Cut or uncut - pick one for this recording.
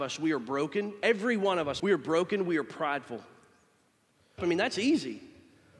cut